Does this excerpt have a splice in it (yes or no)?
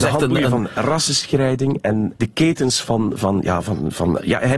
yes